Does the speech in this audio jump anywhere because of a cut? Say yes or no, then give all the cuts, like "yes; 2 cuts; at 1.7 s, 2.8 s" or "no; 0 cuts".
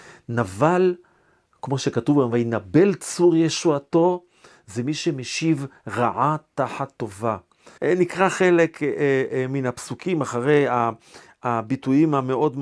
yes; 1 cut; at 7.8 s